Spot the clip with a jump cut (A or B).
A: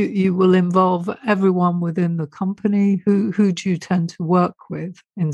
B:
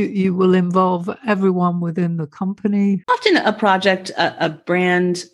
B